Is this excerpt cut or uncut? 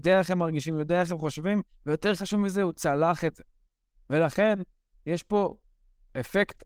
uncut